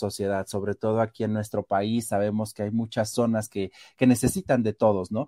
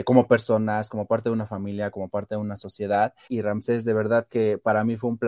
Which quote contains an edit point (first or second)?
second